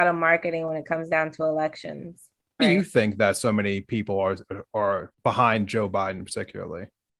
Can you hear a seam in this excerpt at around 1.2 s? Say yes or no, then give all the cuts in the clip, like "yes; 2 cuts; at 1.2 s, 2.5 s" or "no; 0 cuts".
no; 2 cuts; at 2.6 s, 5.1 s